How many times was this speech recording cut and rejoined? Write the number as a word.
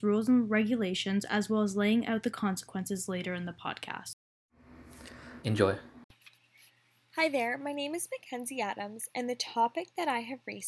one